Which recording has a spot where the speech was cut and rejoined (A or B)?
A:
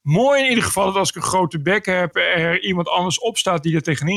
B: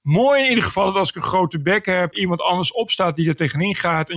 B